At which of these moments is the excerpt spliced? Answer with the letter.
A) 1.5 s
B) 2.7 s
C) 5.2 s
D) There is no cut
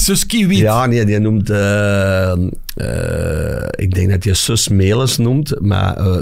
D